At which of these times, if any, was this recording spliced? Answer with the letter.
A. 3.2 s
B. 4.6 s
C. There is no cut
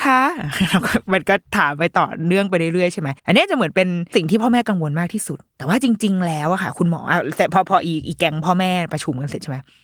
A